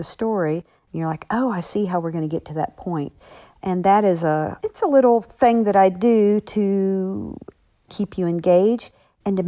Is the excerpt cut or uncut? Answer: cut